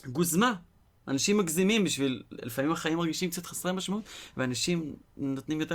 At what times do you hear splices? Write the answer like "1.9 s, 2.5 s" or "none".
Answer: none